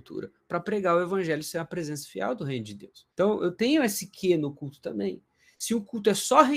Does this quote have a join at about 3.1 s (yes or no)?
yes